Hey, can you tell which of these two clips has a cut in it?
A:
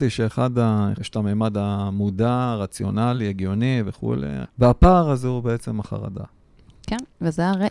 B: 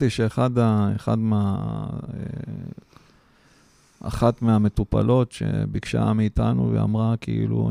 A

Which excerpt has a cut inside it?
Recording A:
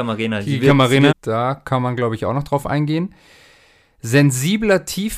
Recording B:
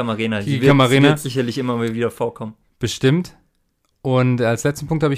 A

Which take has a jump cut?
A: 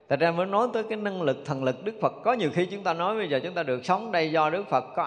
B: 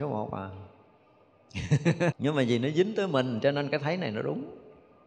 B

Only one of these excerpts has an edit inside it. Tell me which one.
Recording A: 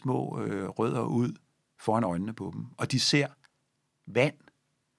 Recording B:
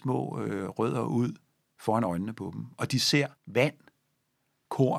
B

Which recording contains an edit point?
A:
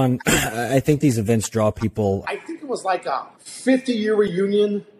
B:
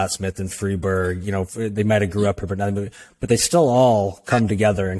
A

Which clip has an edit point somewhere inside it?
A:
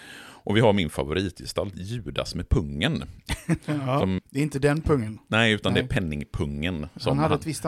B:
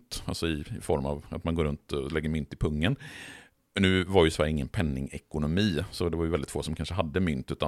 A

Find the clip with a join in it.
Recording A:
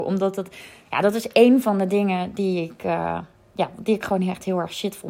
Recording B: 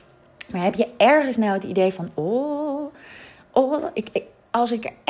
B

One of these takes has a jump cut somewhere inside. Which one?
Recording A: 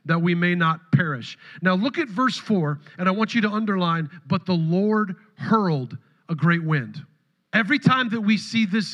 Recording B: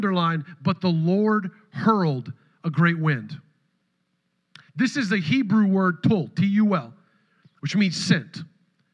A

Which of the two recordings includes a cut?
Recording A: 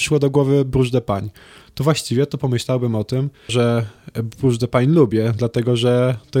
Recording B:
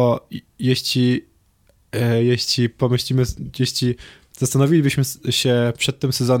A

